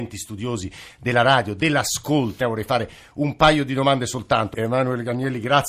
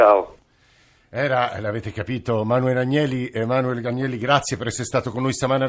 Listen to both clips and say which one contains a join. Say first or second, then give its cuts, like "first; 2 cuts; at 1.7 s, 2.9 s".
first; 2 cuts; at 2.4 s, 4.5 s